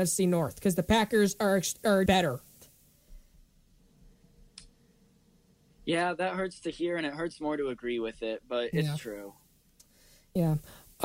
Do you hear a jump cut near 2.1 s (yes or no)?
yes